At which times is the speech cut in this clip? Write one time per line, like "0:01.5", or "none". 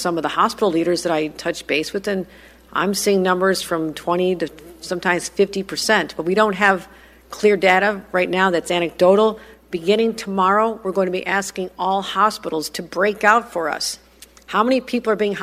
none

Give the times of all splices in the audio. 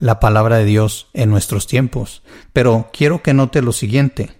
none

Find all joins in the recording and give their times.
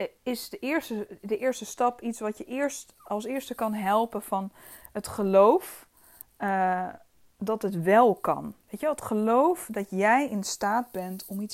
none

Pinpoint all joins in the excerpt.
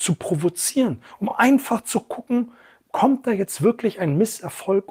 none

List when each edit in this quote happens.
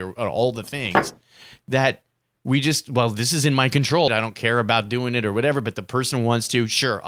0:04.1

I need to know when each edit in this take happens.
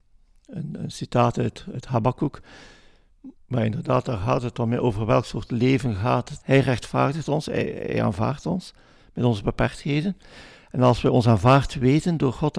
0:03.3
0:06.4

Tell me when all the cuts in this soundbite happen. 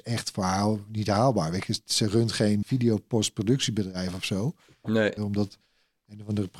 0:02.6
0:05.2

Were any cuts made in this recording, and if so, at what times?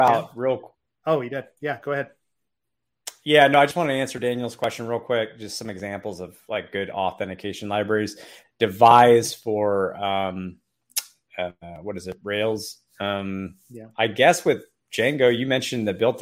0:08.4

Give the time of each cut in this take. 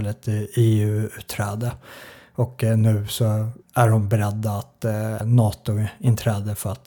0:03.6
0:05.2

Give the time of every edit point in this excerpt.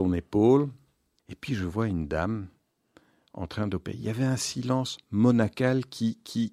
0:01.2

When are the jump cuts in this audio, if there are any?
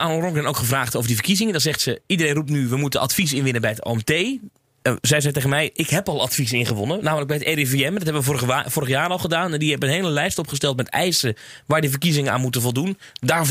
none

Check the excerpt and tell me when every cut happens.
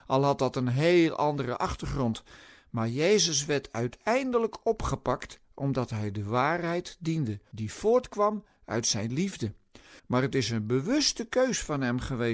0:07.5
0:10.0

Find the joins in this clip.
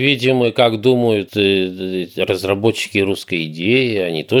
0:01.3

